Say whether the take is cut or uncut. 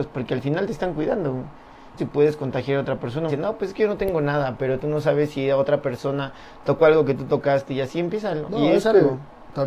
cut